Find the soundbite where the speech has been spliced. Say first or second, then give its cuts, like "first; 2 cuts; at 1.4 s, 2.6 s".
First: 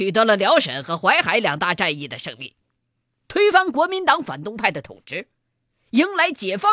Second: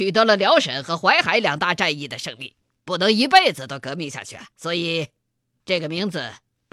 second; 2 cuts; at 2.8 s, 4.5 s